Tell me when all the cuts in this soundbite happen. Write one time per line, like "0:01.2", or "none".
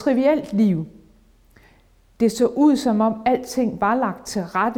none